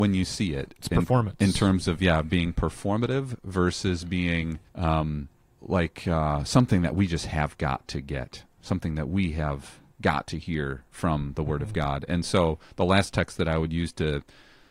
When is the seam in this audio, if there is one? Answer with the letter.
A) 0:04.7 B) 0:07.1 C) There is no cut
A